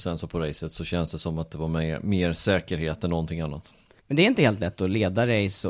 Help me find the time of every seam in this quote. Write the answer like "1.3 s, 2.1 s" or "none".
4.0 s